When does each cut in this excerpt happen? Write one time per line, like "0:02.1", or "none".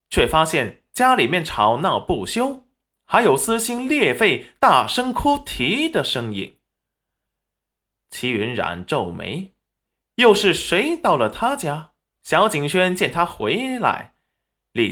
0:12.2